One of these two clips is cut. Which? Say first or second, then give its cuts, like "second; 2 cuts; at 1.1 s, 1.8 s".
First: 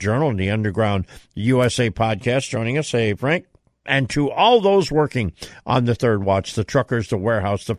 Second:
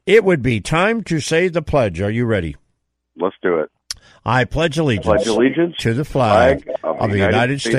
first; 1 cut; at 3.8 s